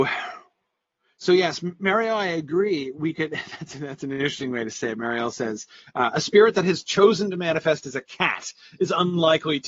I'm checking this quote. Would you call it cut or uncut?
uncut